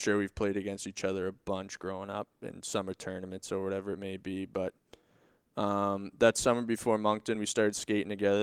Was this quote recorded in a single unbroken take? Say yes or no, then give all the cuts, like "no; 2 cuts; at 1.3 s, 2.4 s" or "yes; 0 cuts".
yes; 0 cuts